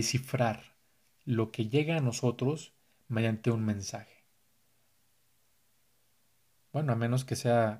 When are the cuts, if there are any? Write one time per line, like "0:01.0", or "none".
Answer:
0:06.6